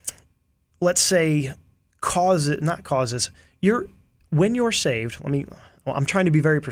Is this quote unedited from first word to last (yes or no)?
yes